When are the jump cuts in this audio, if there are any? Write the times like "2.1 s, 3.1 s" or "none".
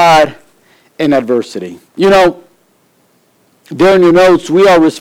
1.9 s